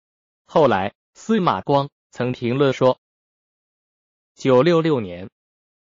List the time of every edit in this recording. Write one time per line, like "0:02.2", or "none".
0:04.3